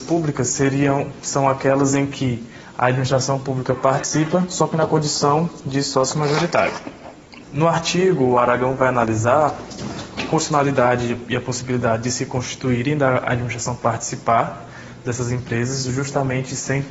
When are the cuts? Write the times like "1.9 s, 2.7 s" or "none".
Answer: 7.4 s